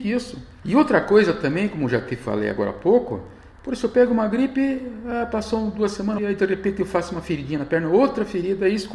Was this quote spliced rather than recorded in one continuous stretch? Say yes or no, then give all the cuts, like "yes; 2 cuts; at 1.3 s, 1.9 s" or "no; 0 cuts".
yes; 1 cut; at 6.2 s